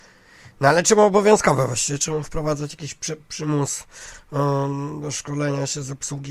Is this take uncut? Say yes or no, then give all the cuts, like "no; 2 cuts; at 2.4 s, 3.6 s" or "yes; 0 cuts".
yes; 0 cuts